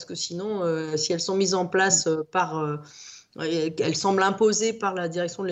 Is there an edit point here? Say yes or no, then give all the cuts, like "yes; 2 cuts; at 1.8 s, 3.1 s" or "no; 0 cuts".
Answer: no; 0 cuts